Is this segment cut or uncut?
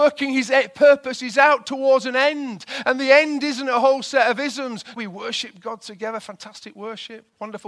cut